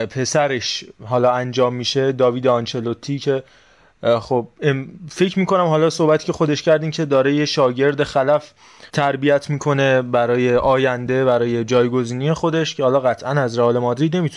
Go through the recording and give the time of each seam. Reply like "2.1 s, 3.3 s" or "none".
8.9 s